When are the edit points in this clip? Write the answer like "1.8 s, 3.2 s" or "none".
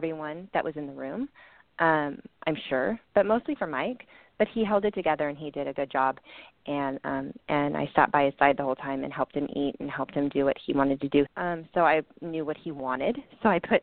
11.3 s